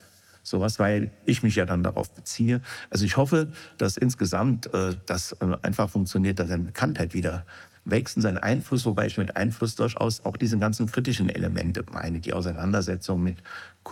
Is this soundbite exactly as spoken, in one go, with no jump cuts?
yes; 0 cuts

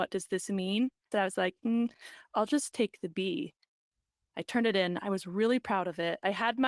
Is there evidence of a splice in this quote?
yes; 2 cuts; at 1.1 s, 4.3 s

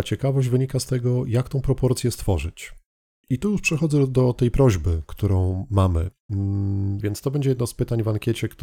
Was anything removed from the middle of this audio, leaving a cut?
yes; 1 cut; at 7.0 s

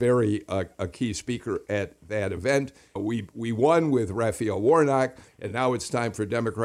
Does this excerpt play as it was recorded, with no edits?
no; 2 cuts; at 3.0 s, 5.3 s

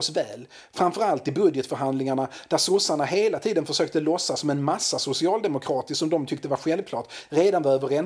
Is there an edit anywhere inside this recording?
no; 0 cuts

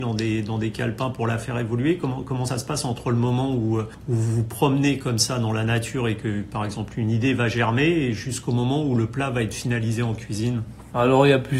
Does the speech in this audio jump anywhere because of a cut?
no; 0 cuts

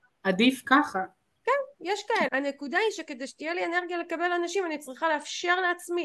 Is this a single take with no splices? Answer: no; 1 cut; at 2.3 s

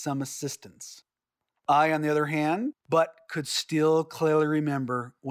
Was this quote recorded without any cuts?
no; 1 cut; at 2.7 s

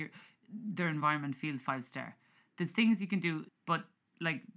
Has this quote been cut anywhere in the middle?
yes; 1 cut; at 3.5 s

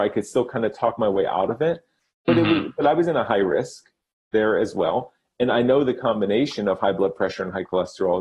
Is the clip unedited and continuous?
yes; 0 cuts

